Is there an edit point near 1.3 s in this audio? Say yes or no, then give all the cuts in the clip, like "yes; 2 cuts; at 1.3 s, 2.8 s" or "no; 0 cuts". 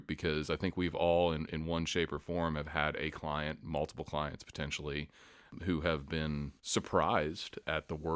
no; 1 cut; at 6.6 s